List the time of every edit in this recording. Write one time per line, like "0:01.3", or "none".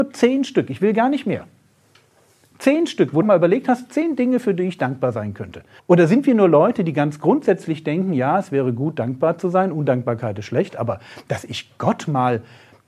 0:03.2
0:05.8